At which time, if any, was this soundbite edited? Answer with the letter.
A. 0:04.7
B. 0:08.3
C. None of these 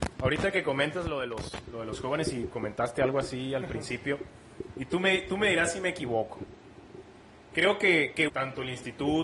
B